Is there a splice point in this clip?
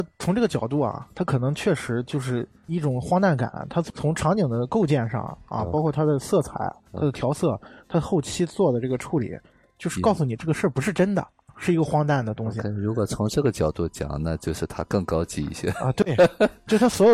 no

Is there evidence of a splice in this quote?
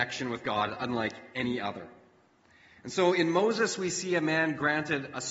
no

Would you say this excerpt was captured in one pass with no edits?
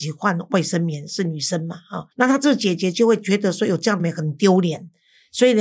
no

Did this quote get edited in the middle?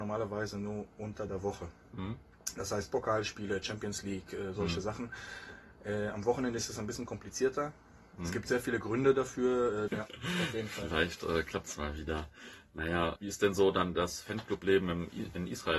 yes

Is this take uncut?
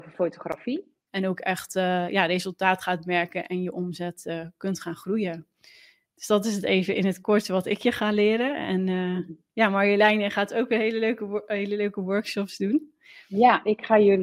no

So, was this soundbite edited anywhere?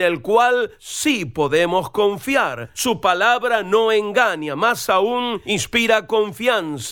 no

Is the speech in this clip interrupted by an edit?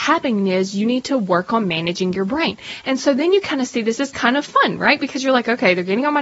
no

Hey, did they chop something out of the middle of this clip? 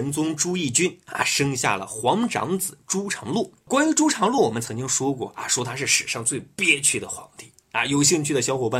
no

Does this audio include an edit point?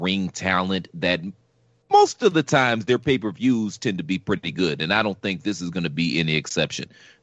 no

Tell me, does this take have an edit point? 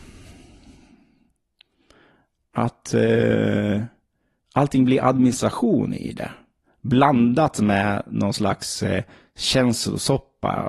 no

